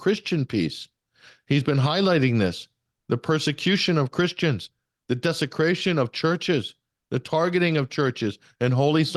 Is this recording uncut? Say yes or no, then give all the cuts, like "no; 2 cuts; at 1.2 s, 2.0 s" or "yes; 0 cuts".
yes; 0 cuts